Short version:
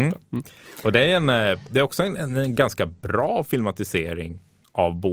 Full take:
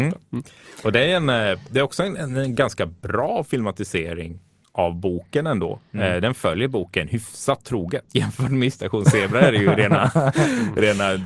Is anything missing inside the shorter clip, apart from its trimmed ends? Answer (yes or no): no